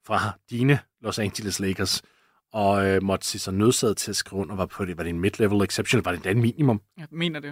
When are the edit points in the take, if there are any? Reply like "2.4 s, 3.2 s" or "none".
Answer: none